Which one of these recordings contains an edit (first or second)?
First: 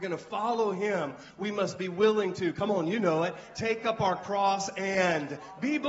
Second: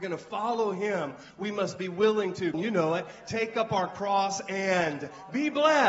second